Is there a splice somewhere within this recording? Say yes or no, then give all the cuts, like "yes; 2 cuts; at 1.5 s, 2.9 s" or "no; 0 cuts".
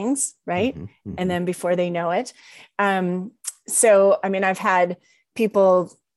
no; 0 cuts